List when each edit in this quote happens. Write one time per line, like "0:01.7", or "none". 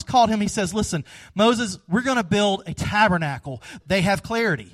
0:03.8